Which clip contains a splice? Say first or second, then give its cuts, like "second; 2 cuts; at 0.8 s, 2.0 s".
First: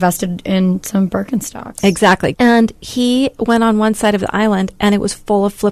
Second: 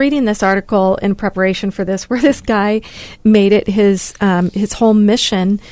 first; 1 cut; at 2.3 s